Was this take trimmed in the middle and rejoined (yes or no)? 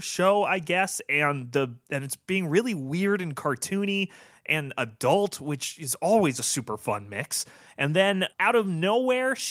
yes